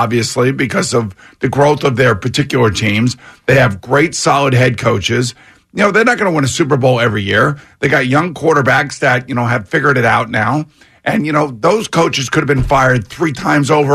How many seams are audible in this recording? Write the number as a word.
zero